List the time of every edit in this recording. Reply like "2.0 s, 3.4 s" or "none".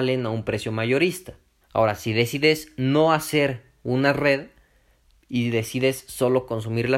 1.6 s